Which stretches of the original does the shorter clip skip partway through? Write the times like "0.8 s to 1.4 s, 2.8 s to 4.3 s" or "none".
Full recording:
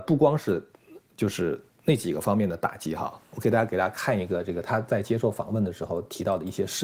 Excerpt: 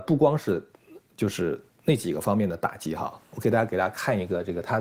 none